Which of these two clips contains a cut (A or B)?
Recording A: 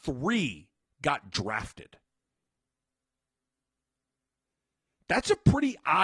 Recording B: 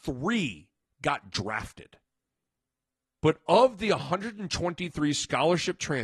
B